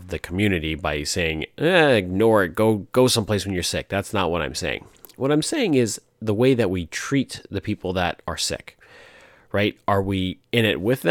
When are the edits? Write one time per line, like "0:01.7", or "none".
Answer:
none